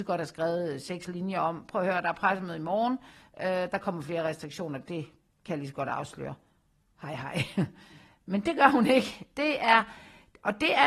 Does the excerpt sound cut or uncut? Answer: uncut